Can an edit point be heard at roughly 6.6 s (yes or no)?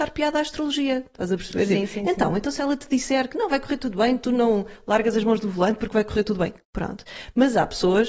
yes